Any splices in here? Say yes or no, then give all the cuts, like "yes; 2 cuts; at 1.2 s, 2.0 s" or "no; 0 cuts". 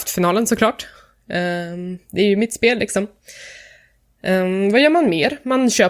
no; 0 cuts